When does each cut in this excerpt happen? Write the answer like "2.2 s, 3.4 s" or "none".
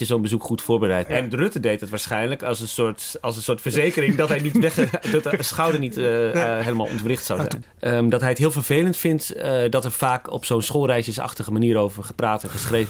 1.1 s, 7.6 s